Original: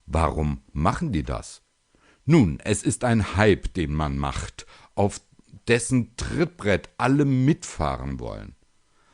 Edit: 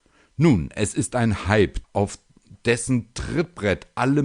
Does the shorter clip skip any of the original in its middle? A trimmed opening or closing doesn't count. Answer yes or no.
yes